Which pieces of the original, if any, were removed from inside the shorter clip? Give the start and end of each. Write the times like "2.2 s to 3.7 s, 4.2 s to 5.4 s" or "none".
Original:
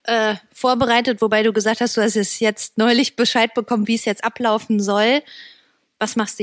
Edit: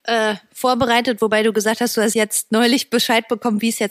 2.1 s to 2.4 s